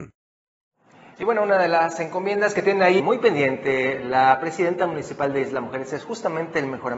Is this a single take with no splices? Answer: no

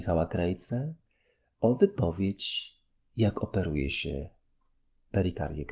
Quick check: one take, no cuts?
yes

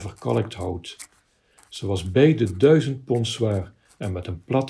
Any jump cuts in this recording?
no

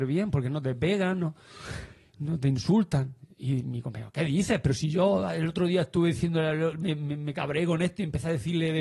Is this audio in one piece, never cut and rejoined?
yes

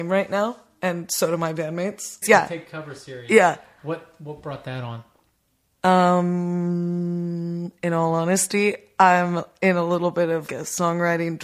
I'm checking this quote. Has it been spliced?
yes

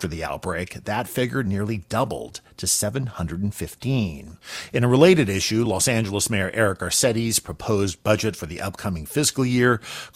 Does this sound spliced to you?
no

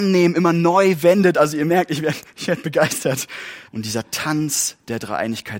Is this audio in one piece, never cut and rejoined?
no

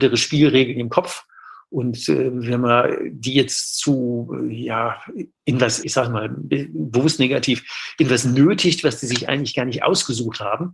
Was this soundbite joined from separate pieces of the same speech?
yes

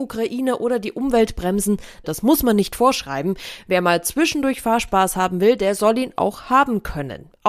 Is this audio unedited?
no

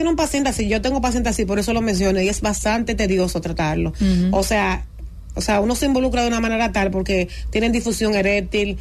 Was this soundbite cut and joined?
no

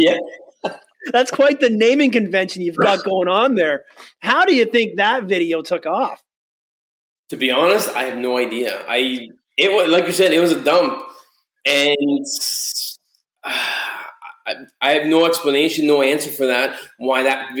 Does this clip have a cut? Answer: no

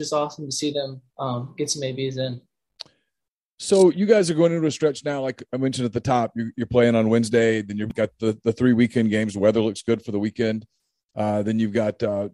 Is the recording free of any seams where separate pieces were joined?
no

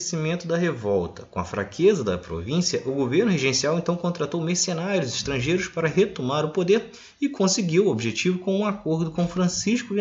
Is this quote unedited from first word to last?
yes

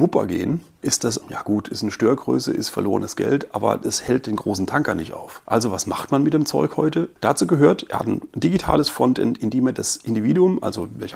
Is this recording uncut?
no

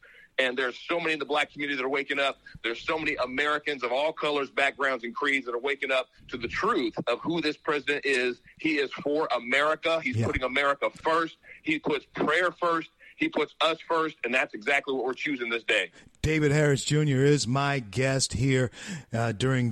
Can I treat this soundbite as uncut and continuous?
yes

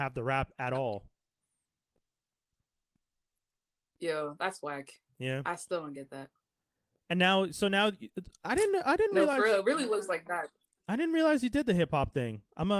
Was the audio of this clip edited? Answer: no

